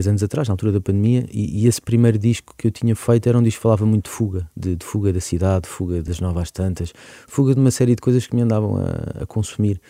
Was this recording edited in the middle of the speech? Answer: yes; 1 cut; at 6.1 s

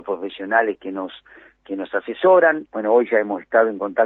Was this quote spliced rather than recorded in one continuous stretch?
yes; 1 cut; at 2.7 s

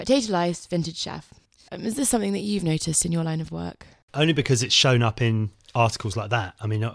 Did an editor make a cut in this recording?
yes; 1 cut; at 1.7 s

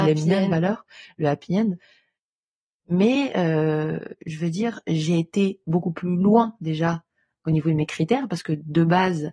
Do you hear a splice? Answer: no; 0 cuts

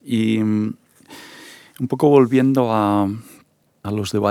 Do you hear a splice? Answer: no; 0 cuts

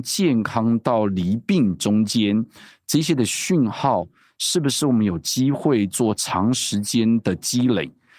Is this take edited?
no; 0 cuts

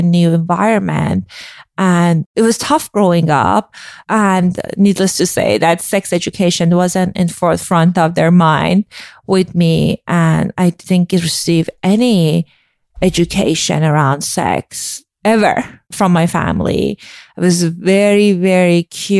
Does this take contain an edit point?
no; 0 cuts

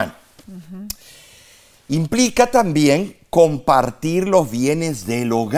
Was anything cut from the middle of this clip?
no; 0 cuts

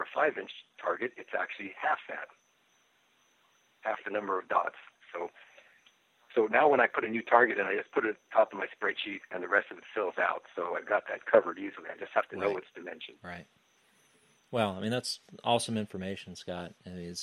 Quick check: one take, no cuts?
yes; 0 cuts

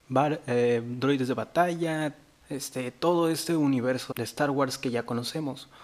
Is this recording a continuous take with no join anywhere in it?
no; 2 cuts; at 2.4 s, 4.1 s

